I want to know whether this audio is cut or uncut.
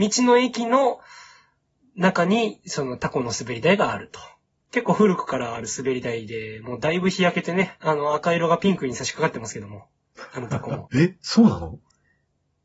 cut